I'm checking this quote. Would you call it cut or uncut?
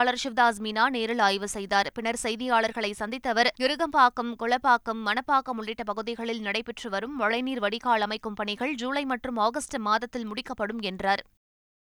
cut